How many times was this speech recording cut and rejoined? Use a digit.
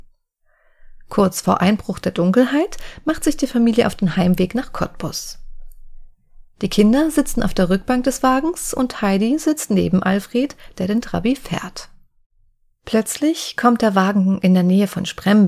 0